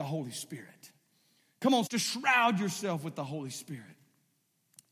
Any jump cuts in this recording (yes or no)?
yes